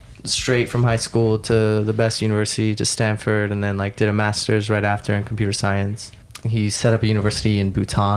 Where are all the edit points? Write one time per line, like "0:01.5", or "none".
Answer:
0:06.4